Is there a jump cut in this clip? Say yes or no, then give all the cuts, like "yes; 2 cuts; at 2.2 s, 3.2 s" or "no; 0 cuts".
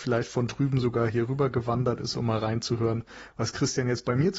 no; 0 cuts